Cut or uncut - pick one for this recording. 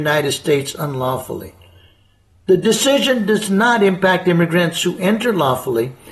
uncut